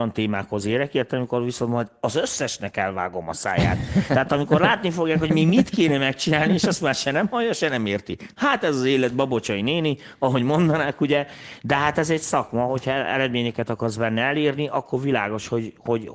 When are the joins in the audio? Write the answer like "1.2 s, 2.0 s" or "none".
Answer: none